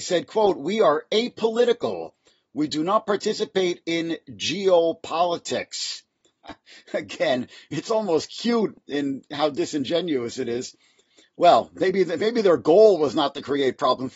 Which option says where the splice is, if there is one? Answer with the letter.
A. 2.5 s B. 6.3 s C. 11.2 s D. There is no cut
B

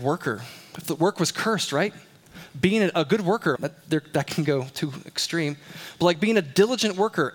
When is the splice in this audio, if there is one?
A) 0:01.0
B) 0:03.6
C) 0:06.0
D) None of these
B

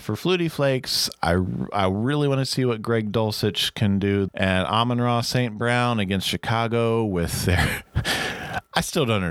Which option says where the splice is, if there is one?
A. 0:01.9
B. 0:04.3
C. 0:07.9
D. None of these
B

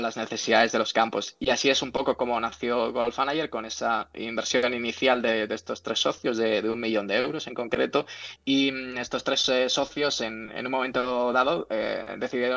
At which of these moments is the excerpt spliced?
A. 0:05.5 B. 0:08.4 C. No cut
B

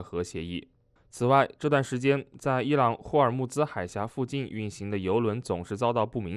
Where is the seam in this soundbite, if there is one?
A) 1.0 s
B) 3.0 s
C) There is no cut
A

